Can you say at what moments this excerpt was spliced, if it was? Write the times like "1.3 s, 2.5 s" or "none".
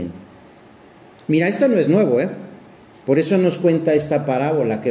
2.9 s